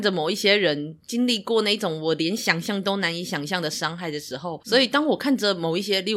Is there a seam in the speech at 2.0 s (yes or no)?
no